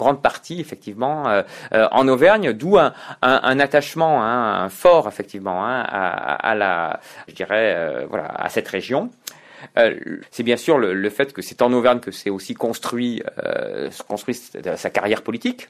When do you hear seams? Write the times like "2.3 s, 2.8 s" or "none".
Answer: 7.3 s